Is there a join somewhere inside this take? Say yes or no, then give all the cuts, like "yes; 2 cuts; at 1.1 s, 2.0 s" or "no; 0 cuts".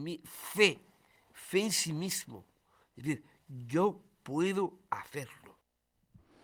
no; 0 cuts